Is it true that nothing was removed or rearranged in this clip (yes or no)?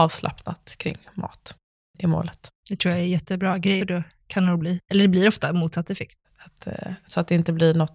no